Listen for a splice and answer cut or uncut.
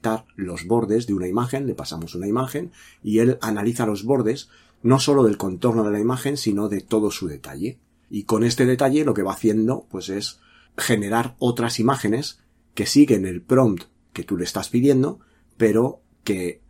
uncut